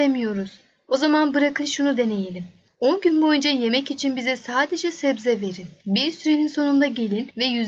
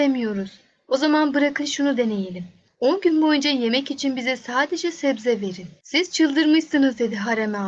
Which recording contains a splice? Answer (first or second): second